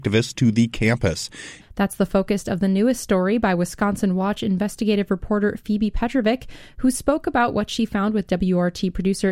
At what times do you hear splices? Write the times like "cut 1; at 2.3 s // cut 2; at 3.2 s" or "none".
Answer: cut 1; at 1.6 s